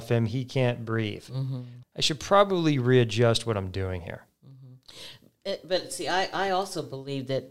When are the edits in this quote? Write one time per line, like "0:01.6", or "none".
0:01.8
0:04.3